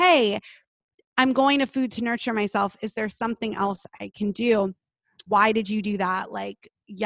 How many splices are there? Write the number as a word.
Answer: one